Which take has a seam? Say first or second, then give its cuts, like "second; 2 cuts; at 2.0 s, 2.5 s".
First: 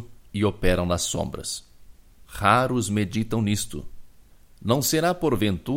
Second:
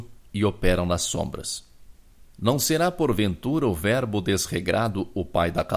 second; 1 cut; at 2.3 s